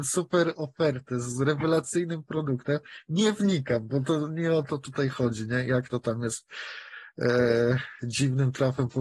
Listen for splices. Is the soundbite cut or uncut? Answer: uncut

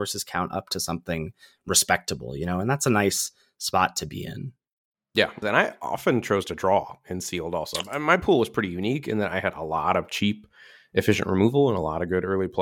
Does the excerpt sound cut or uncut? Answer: cut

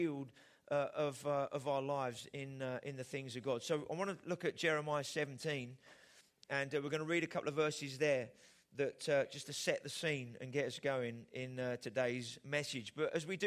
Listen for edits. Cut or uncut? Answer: uncut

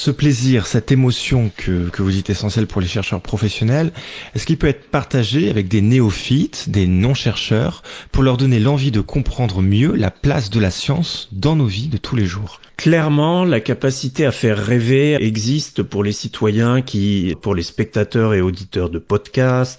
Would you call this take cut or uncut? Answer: cut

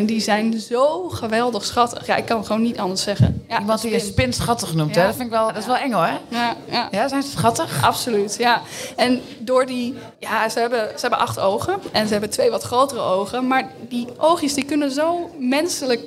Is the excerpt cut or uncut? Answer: cut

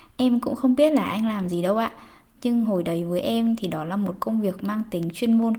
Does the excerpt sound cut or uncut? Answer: uncut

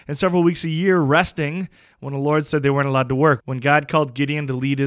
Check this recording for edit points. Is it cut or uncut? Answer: cut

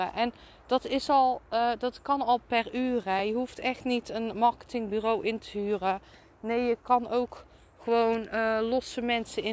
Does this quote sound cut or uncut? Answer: uncut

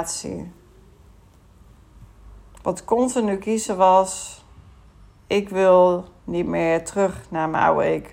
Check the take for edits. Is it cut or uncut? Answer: cut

